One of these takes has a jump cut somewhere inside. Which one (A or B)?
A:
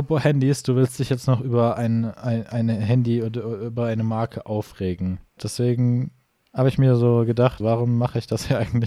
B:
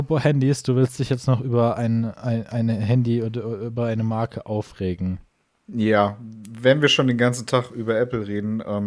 A